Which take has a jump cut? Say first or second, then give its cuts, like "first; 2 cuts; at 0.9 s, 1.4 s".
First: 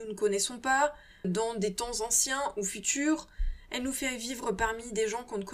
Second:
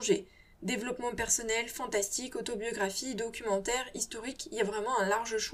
first; 1 cut; at 1.2 s